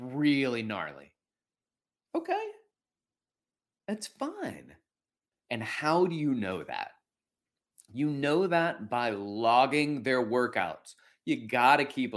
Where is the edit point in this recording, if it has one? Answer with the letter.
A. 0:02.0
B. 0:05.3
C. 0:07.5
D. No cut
B